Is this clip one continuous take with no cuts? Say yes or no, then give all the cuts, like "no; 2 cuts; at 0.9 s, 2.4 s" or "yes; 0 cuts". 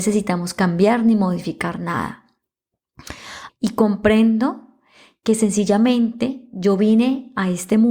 no; 1 cut; at 3.5 s